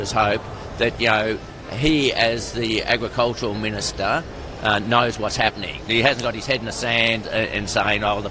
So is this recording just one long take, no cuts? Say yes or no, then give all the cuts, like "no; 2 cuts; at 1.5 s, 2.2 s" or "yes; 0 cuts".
no; 2 cuts; at 5.9 s, 7.2 s